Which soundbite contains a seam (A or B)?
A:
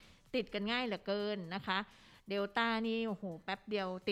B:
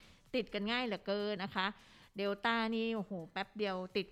B